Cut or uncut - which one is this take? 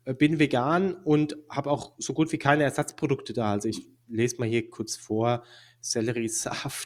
uncut